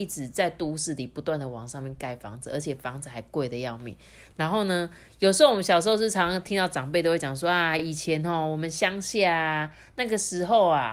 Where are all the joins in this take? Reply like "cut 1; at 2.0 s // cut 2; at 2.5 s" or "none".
none